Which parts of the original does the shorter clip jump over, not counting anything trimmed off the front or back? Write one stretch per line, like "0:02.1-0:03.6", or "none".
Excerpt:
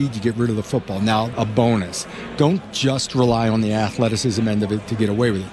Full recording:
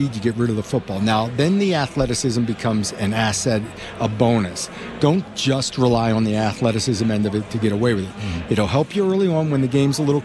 0:01.3-0:03.9